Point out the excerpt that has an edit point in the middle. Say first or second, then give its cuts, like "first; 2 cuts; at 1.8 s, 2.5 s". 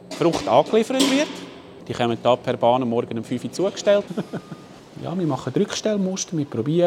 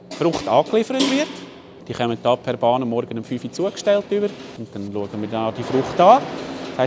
first; 1 cut; at 4.1 s